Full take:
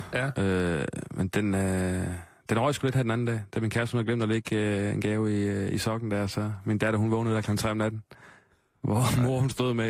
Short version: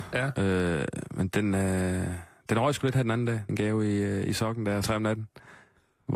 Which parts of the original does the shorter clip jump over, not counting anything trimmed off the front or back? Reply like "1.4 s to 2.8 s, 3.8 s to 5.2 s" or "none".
3.5 s to 4.9 s, 6.3 s to 7.6 s